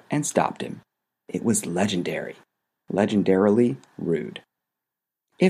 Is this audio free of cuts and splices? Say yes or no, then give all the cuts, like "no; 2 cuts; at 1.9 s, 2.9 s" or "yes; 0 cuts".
yes; 0 cuts